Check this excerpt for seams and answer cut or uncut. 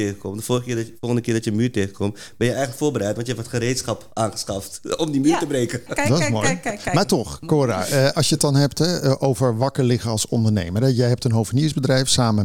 cut